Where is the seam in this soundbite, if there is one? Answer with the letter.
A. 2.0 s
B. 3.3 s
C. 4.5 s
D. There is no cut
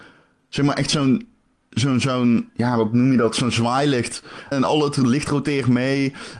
C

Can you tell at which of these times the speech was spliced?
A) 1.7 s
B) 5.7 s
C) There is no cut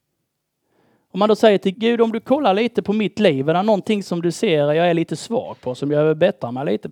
A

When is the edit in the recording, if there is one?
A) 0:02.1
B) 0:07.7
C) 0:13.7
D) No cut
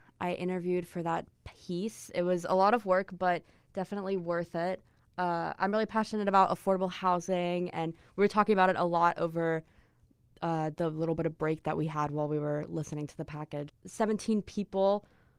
C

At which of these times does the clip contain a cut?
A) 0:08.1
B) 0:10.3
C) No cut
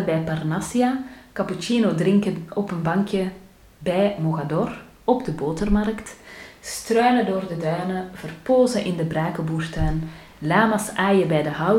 C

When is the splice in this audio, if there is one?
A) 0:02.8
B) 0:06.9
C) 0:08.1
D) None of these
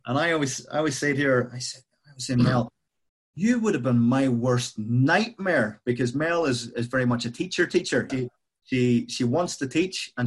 C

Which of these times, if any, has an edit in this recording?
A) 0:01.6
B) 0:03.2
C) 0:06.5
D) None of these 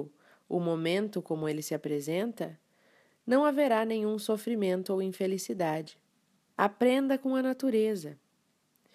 C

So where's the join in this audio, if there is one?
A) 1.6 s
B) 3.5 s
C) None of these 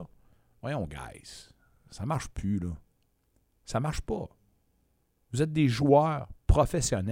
C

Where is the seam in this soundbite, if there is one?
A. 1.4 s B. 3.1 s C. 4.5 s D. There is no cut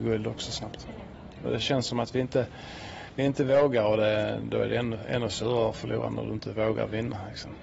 A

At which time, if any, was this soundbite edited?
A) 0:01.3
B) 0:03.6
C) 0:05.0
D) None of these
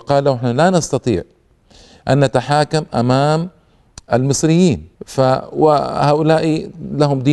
C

